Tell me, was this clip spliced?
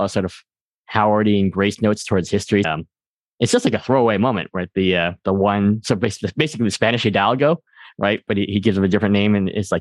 yes; 1 cut; at 2.6 s

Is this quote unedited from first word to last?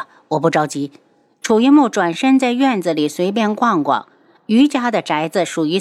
yes; 0 cuts

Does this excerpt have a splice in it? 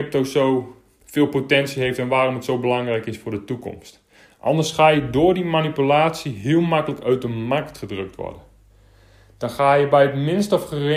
no; 0 cuts

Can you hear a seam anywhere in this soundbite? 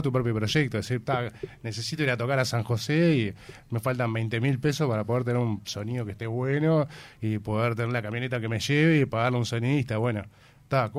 no; 0 cuts

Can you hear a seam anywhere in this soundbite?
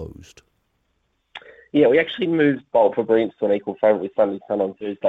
no; 0 cuts

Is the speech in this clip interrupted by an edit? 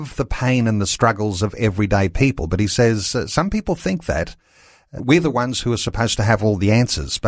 yes; 1 cut; at 5.0 s

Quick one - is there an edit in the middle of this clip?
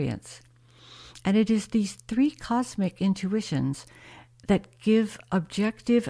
no; 0 cuts

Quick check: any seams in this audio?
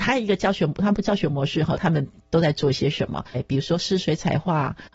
yes; 2 cuts; at 1.7 s, 3.3 s

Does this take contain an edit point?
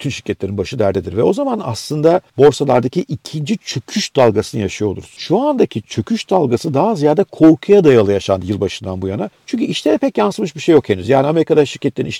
no; 0 cuts

